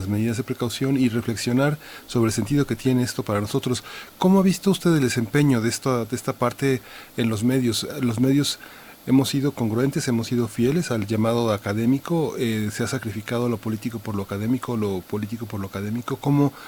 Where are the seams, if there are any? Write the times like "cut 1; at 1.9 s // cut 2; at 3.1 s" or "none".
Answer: none